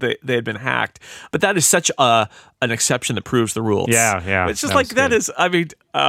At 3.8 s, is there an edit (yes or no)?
yes